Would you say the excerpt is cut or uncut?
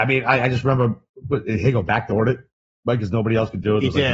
uncut